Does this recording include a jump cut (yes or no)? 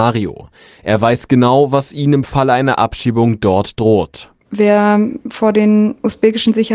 yes